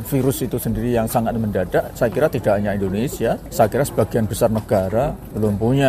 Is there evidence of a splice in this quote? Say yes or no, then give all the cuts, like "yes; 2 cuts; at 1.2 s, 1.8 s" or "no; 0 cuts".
no; 0 cuts